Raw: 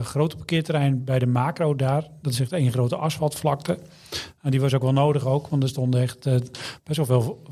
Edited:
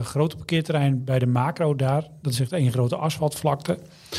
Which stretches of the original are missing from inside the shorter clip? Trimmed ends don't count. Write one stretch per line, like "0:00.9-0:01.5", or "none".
none